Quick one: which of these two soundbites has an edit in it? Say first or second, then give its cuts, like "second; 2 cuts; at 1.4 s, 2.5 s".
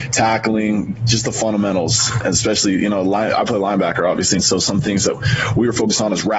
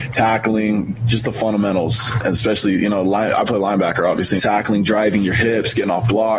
second; 1 cut; at 4.4 s